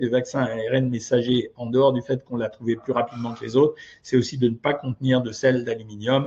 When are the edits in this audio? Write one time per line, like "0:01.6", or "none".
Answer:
none